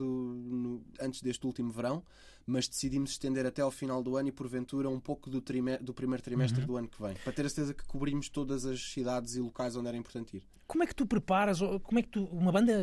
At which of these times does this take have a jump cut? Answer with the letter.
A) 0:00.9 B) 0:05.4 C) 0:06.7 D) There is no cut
A